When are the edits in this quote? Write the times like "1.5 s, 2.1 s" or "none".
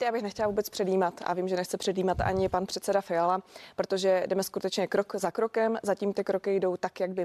none